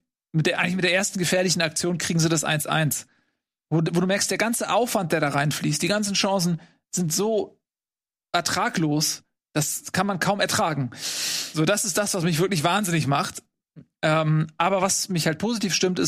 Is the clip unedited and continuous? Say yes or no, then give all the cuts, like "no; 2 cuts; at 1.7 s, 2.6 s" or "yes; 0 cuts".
yes; 0 cuts